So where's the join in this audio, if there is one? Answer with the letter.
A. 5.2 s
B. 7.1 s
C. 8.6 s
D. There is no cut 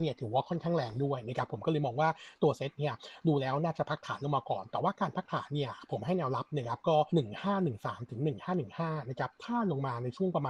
B